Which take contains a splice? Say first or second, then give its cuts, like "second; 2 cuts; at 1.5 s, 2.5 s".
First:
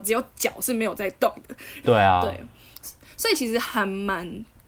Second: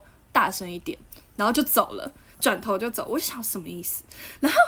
first; 1 cut; at 1.8 s